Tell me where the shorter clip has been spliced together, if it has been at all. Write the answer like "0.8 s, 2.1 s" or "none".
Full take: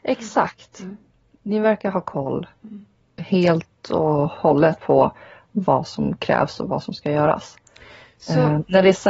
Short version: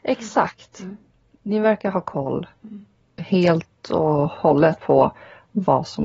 none